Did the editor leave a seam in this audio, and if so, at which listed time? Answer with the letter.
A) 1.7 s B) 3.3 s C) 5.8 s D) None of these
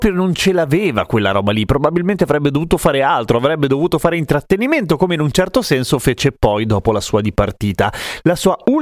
D